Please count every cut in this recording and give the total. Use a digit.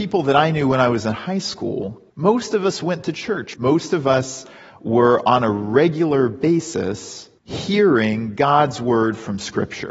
3